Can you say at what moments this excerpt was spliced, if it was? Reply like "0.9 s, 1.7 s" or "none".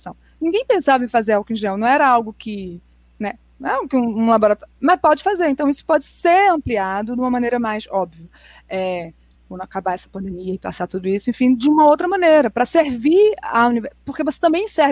none